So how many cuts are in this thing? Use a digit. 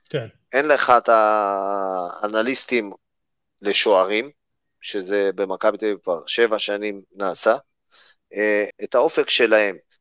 1